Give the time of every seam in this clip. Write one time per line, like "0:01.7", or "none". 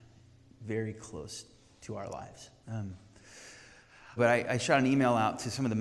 0:02.6
0:04.2